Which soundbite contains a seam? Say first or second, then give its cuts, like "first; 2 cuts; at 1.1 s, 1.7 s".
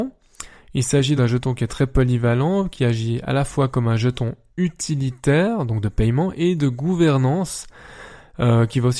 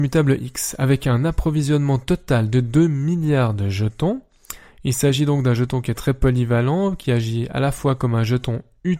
first; 1 cut; at 1.2 s